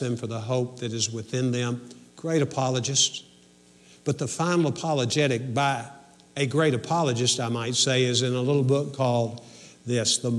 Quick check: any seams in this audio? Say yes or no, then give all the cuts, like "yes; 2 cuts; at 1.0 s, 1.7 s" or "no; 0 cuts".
no; 0 cuts